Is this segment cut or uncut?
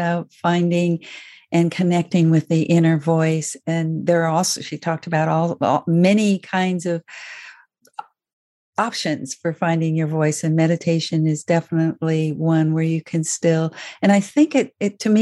cut